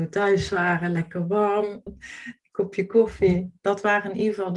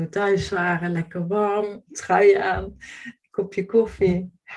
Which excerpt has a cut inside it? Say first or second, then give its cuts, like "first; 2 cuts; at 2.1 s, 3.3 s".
first; 2 cuts; at 1.9 s, 3.6 s